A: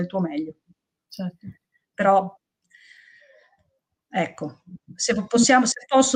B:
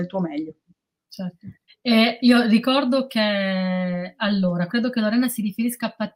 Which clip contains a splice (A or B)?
B